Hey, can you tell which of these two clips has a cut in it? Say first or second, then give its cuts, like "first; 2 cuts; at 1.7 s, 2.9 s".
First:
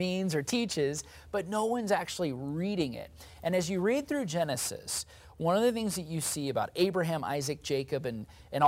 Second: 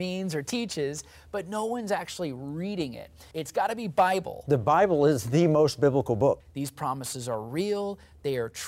second; 2 cuts; at 3.3 s, 6.4 s